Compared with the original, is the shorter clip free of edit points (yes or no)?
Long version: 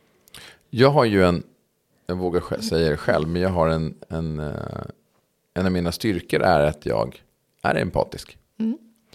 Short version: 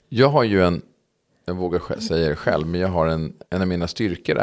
no